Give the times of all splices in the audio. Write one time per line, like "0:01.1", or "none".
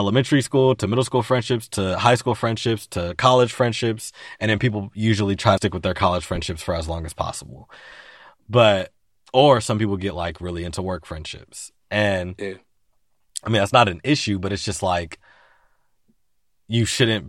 0:05.6